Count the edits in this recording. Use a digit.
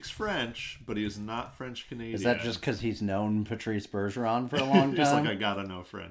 0